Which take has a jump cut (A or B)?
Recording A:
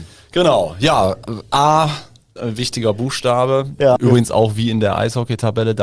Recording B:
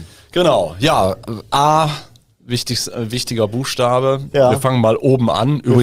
A